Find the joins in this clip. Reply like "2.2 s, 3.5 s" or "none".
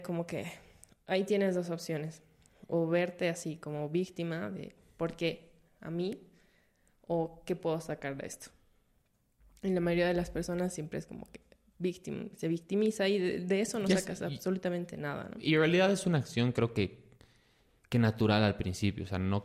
none